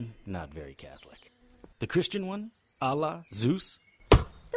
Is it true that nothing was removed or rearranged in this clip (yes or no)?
no